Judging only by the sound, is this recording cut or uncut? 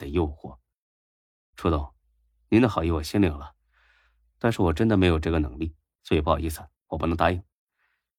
uncut